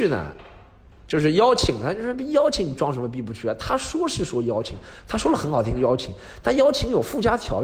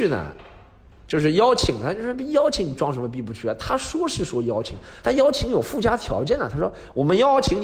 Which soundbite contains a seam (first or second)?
second